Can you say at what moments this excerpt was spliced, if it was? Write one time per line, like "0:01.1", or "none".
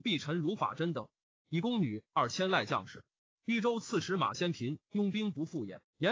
0:03.3